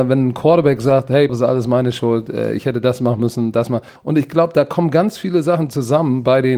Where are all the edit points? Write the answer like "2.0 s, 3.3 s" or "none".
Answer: 1.3 s, 4.0 s